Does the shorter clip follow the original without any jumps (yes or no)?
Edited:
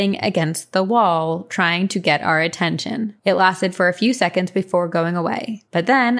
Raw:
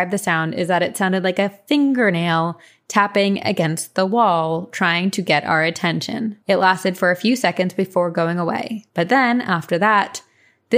yes